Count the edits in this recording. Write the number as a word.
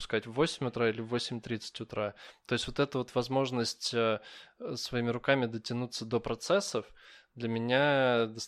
zero